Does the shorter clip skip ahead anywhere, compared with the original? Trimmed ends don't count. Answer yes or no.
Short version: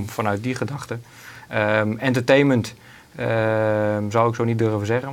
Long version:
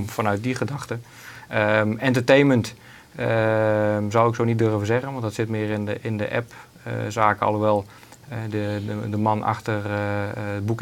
no